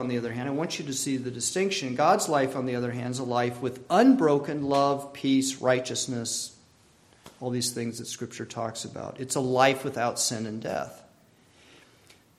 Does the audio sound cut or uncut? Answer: uncut